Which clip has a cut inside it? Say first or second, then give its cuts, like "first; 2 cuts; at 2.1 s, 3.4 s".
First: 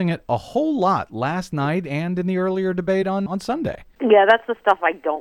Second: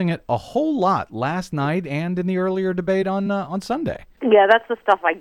first; 1 cut; at 3.3 s